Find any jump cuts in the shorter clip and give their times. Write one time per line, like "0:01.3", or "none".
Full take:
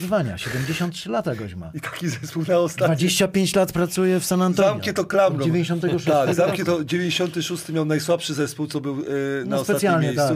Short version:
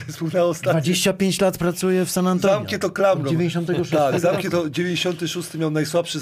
none